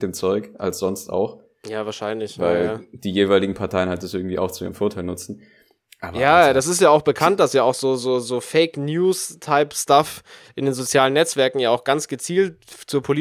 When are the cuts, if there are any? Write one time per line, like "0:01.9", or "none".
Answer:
none